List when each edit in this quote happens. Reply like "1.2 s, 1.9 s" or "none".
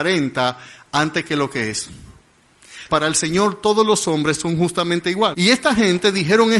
2.9 s, 5.3 s